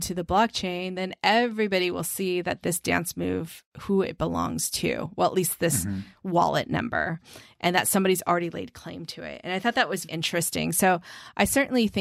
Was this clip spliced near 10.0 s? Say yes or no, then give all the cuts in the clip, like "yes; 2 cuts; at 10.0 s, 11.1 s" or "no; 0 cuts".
yes; 1 cut; at 10.0 s